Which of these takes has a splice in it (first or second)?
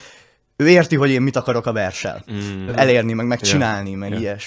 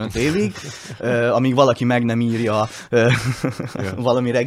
first